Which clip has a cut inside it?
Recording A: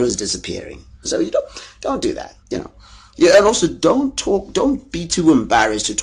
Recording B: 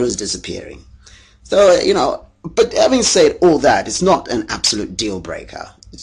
A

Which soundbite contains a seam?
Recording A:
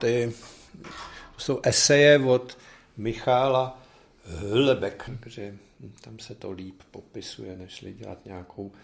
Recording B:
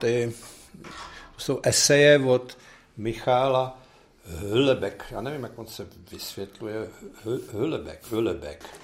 A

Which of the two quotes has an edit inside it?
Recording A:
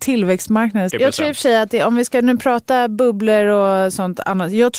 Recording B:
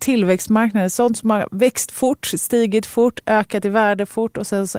A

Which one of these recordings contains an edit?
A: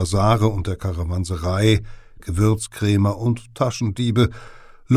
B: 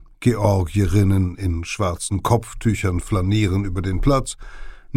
A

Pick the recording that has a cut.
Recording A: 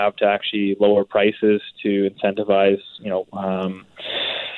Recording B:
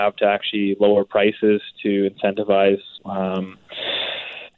B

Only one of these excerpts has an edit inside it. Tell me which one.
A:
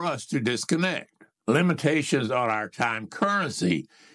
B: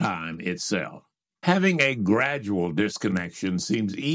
A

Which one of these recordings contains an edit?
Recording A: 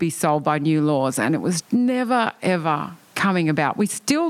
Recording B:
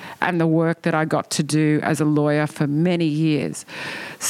A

